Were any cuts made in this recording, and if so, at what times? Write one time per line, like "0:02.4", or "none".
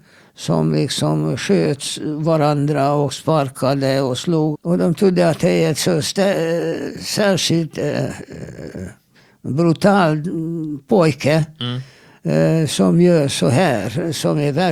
0:04.5